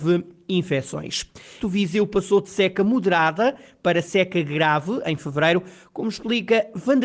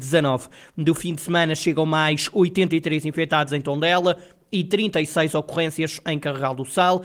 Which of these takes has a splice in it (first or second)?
first